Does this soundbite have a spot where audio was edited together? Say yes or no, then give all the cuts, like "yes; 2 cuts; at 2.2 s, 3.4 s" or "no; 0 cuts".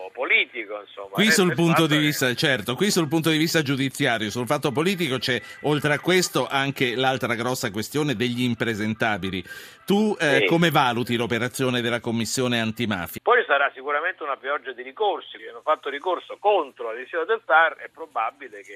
yes; 2 cuts; at 13.2 s, 15.4 s